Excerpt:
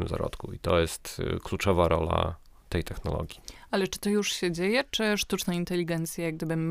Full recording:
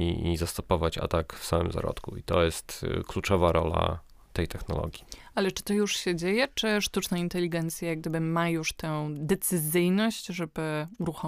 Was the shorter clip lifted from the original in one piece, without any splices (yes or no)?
yes